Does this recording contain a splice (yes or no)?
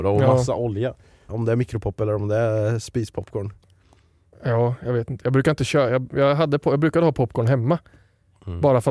yes